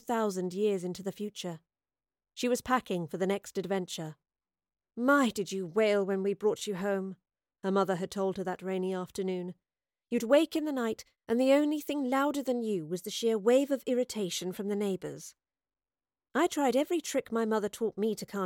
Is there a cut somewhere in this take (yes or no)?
no